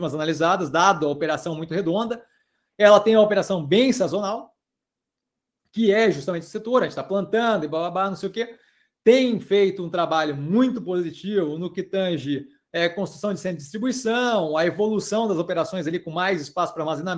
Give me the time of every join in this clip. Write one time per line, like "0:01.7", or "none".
none